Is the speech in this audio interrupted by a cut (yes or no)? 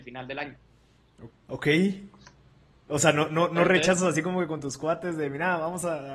yes